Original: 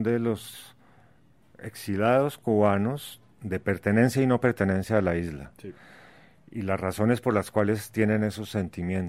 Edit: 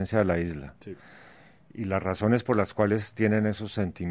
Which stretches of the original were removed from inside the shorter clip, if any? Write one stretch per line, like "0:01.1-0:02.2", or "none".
none